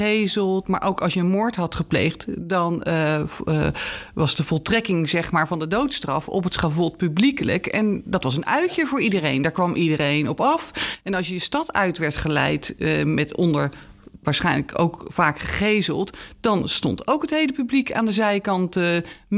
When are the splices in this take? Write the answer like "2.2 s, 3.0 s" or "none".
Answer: none